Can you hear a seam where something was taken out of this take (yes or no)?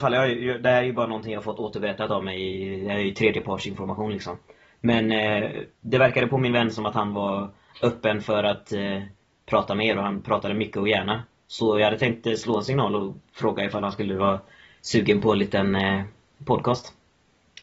no